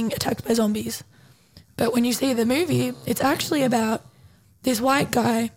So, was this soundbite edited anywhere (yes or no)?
no